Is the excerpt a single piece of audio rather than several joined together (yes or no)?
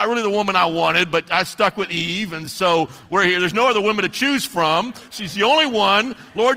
yes